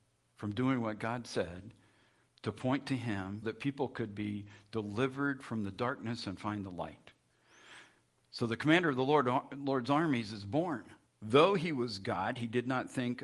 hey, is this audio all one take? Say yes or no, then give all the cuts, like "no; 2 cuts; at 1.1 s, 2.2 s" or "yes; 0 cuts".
no; 2 cuts; at 3.4 s, 11.1 s